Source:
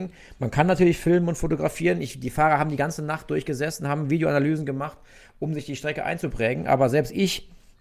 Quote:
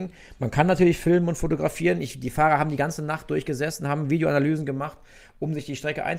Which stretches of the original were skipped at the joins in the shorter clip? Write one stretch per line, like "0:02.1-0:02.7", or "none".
none